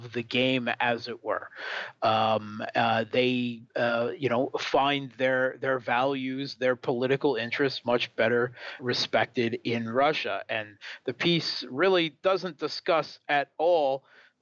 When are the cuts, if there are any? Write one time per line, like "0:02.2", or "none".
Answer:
0:08.8